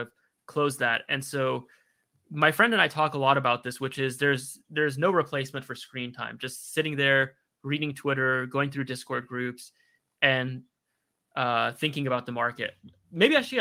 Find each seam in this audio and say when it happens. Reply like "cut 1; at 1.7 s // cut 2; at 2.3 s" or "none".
none